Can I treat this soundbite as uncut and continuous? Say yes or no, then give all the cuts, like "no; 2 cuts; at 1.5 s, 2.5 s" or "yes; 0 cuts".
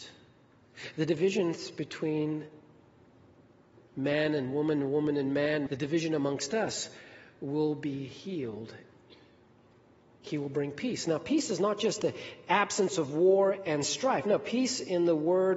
no; 1 cut; at 5.7 s